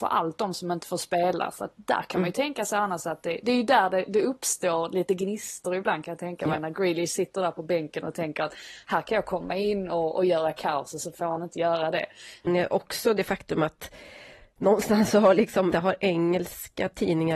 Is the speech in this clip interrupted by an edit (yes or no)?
yes